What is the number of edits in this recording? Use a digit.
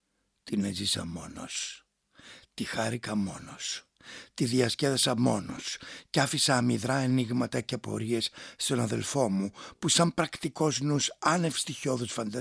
0